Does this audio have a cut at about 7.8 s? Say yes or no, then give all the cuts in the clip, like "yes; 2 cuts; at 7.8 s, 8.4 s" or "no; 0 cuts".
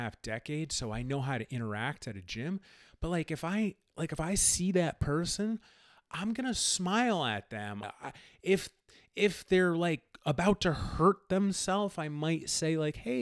yes; 1 cut; at 7.8 s